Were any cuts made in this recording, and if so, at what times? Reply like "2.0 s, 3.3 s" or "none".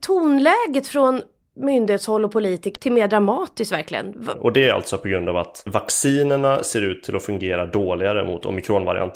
2.7 s, 4.3 s